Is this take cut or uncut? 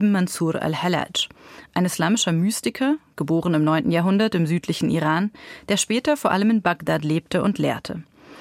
uncut